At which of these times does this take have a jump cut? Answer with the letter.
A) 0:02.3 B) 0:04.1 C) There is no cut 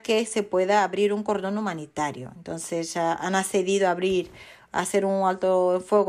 C